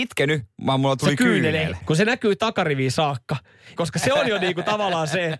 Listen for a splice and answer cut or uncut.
cut